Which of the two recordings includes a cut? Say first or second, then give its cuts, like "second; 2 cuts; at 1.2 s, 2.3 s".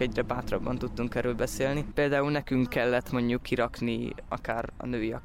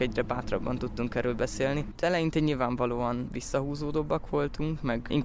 second; 1 cut; at 2.0 s